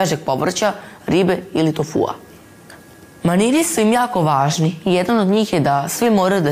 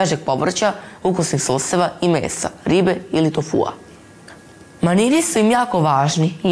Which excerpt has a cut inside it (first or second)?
first